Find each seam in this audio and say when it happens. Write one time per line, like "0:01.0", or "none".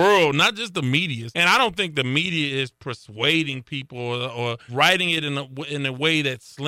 0:01.3
0:04.7